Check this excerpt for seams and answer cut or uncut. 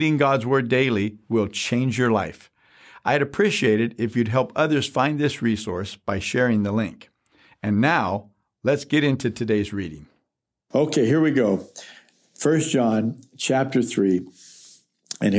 uncut